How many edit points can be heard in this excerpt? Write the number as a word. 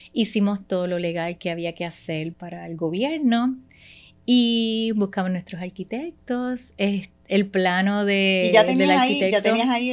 one